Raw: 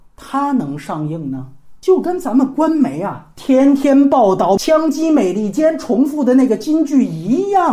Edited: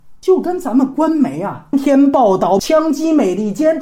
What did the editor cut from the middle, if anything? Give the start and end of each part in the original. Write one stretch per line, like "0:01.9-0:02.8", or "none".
0:03.3-0:03.7